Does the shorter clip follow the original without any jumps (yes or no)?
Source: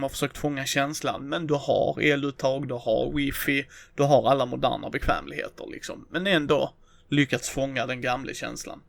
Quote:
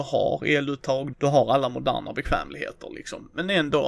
no